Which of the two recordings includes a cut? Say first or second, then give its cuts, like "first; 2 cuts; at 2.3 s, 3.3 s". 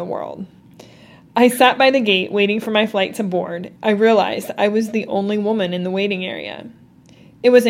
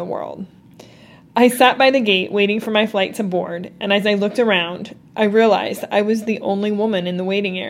first; 1 cut; at 3.7 s